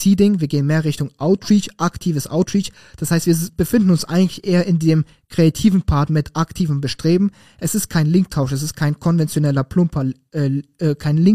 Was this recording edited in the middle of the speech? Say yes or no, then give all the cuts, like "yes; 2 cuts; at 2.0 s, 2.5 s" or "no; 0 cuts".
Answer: no; 0 cuts